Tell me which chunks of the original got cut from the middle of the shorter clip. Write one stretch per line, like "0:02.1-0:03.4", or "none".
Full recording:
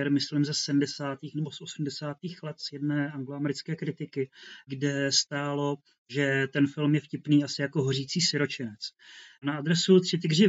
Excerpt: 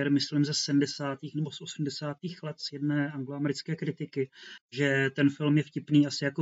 0:04.6-0:05.9